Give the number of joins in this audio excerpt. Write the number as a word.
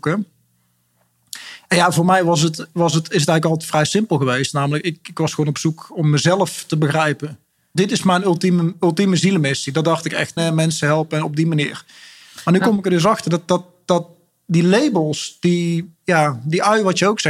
two